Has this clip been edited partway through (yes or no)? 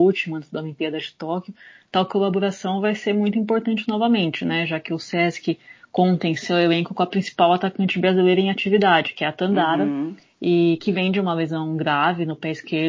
no